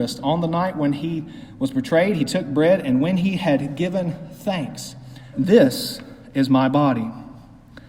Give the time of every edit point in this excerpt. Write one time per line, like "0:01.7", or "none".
0:05.3